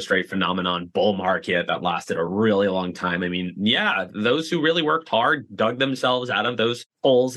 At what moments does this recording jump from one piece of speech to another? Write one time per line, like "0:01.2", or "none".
none